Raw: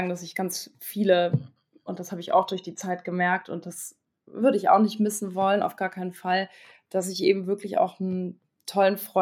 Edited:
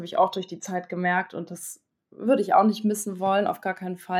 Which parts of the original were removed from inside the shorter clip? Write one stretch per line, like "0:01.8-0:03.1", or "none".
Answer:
none